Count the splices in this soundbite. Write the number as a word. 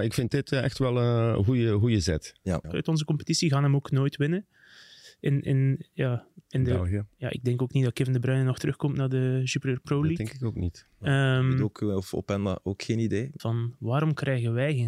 two